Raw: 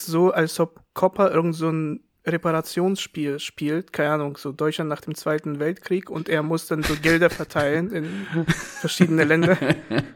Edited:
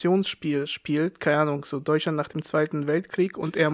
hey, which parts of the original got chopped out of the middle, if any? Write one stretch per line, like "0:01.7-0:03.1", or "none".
none